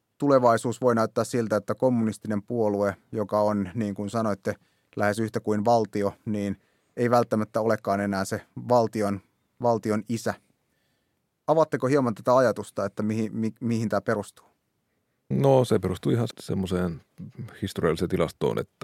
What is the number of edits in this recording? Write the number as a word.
two